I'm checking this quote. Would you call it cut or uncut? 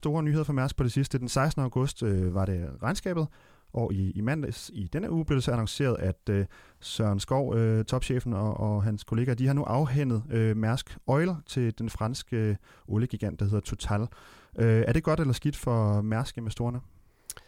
uncut